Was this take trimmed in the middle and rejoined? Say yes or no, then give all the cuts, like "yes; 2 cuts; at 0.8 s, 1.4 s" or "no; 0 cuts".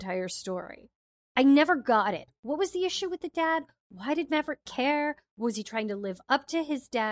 no; 0 cuts